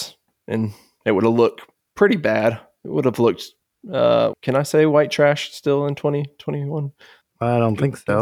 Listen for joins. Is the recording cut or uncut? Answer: cut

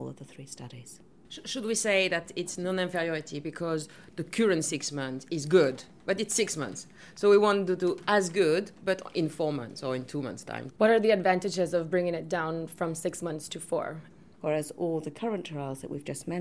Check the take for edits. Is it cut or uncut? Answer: cut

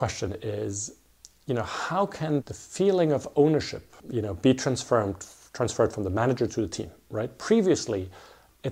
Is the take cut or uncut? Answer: cut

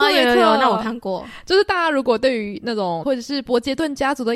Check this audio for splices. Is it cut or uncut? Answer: cut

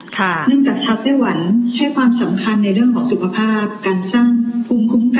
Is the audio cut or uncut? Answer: uncut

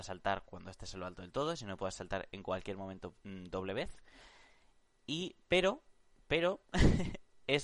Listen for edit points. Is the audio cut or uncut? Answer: cut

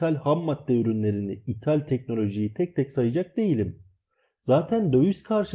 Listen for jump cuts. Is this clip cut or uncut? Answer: uncut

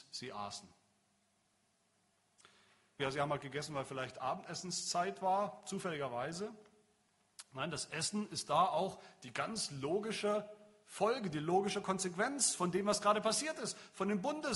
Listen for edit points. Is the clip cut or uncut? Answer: cut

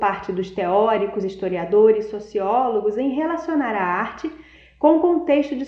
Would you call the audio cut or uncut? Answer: uncut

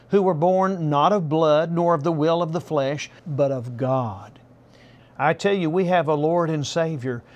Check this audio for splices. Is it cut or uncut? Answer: cut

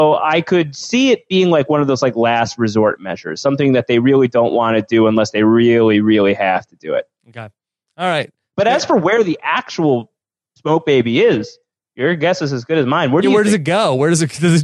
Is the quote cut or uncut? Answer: uncut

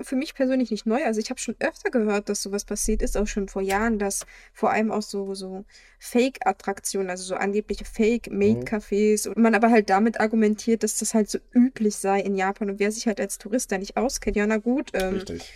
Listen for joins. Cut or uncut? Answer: cut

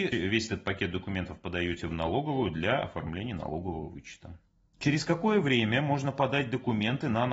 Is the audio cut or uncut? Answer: uncut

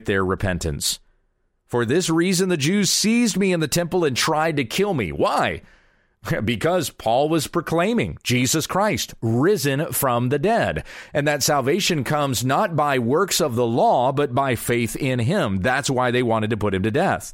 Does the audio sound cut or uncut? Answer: uncut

